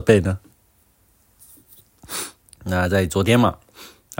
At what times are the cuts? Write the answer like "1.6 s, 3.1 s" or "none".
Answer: 2.4 s

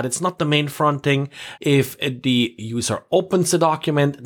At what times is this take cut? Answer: 1.6 s

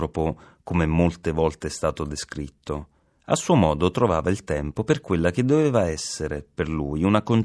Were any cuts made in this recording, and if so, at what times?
none

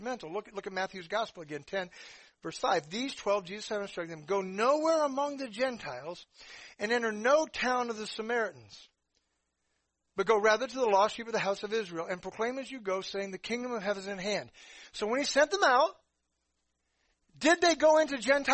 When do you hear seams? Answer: none

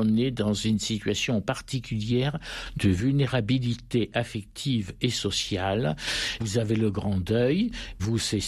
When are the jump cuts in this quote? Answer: 6.4 s

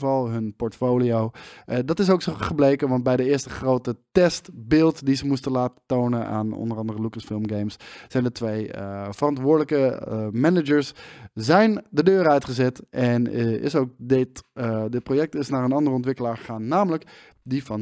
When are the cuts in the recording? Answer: none

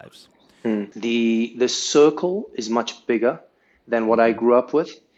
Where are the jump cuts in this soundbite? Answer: 0.9 s

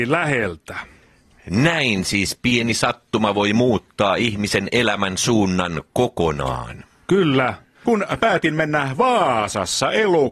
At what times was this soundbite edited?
7.8 s

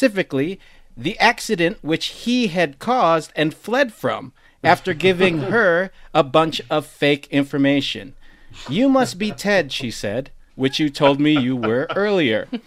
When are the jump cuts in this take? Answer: 10.5 s

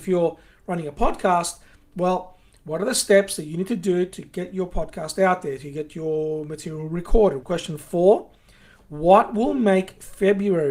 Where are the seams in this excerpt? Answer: 7.4 s

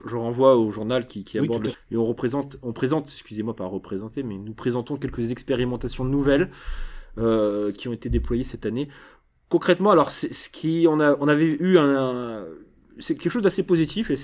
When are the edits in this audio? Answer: 1.7 s

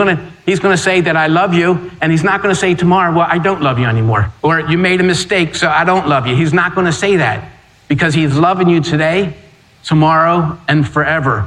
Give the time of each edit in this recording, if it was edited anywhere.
4.4 s

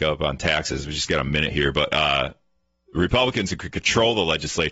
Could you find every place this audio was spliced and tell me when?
none

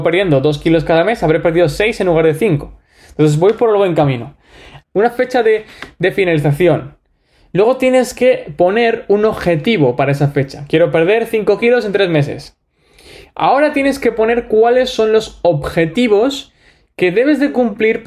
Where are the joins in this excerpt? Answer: 4.8 s

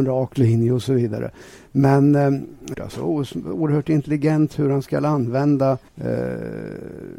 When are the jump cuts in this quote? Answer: 2.7 s, 5.9 s

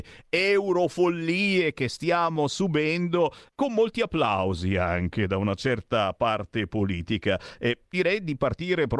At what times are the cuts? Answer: 3.5 s

